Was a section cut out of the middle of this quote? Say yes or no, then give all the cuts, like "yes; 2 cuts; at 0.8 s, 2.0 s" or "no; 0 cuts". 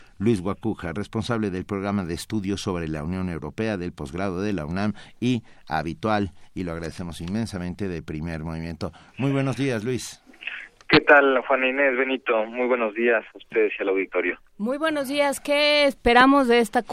no; 0 cuts